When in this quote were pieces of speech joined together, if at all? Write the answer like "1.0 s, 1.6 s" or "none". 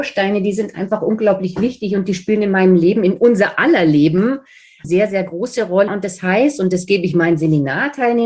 4.8 s, 5.9 s

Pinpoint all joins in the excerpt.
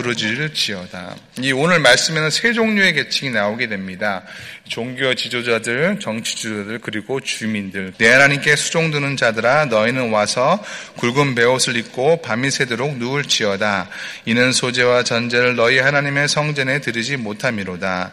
7.9 s

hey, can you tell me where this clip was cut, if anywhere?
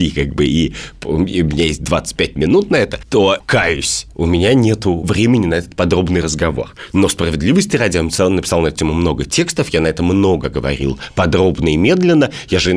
none

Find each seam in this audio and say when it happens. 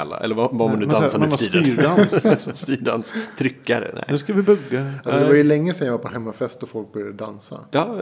none

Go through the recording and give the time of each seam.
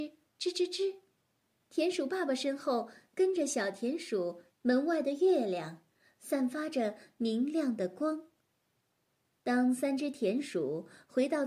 4.5 s

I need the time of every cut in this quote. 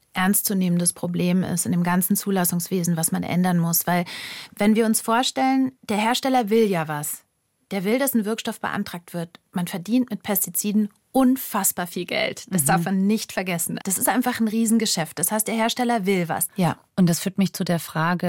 5.8 s, 13.8 s, 16.5 s

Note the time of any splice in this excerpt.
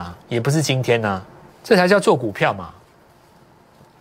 1.5 s

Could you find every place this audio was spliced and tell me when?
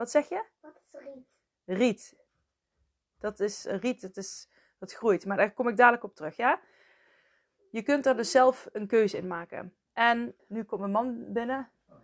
10.4 s

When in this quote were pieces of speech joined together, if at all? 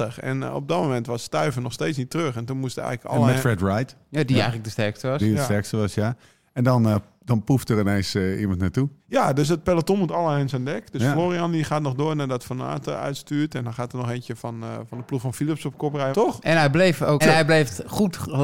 9.0 s, 16.1 s, 17.2 s

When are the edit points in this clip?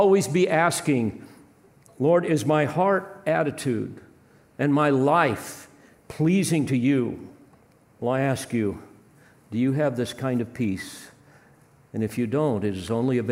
8.0 s

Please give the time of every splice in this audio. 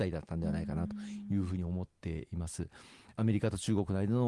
none

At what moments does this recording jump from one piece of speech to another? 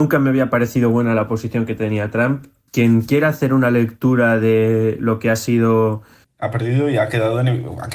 2.7 s, 6.2 s

